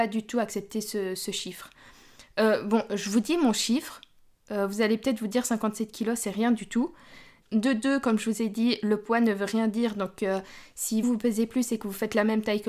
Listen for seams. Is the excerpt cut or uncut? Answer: cut